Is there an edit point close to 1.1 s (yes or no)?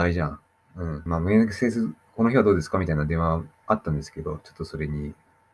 yes